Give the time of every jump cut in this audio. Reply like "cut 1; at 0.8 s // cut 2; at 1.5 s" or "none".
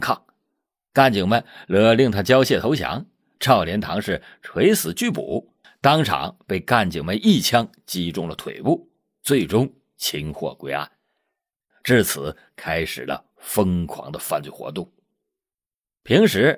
cut 1; at 11.7 s

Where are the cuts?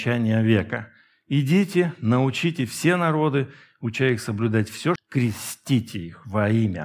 cut 1; at 5.0 s

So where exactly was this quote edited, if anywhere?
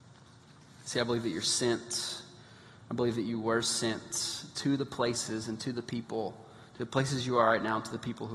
none

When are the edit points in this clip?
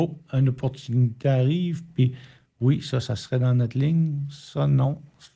none

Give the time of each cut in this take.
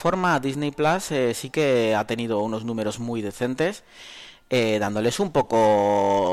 none

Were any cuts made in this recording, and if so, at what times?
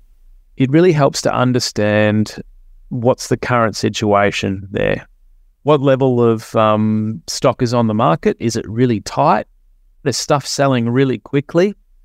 cut 1; at 10.0 s

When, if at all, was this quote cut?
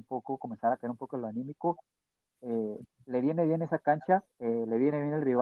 cut 1; at 4.3 s

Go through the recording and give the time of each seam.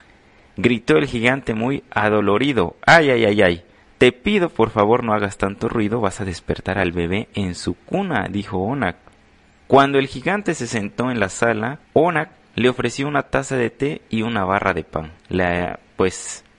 cut 1; at 9.7 s // cut 2; at 11.8 s // cut 3; at 15.2 s

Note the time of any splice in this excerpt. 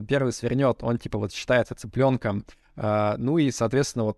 none

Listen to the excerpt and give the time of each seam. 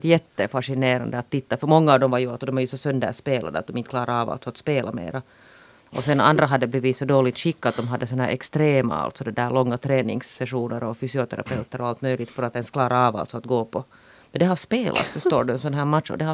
none

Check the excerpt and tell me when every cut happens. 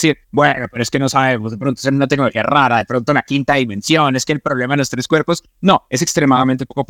none

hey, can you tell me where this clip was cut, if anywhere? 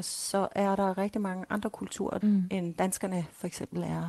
cut 1; at 2.2 s

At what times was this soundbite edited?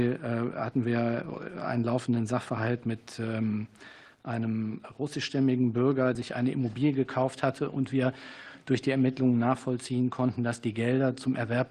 cut 1; at 6.2 s

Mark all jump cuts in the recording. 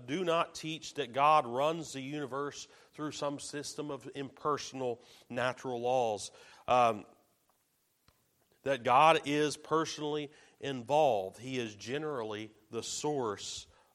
cut 1; at 6.5 s

